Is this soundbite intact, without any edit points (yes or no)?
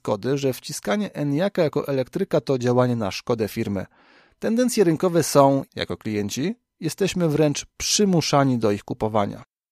no